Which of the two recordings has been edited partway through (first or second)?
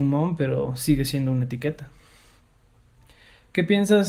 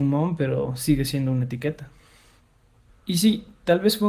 second